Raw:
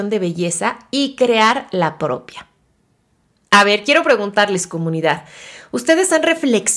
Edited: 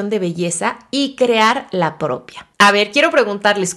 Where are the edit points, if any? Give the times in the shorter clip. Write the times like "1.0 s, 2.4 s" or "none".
2.5 s